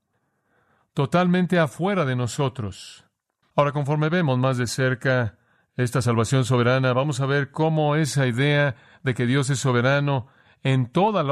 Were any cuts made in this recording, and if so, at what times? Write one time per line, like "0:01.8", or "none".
0:03.4